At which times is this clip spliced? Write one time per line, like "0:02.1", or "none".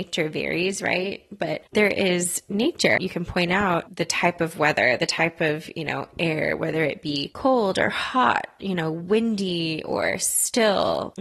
0:01.7
0:03.0